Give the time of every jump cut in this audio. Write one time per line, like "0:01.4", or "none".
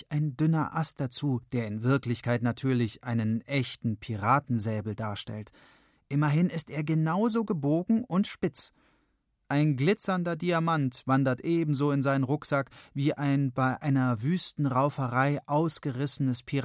none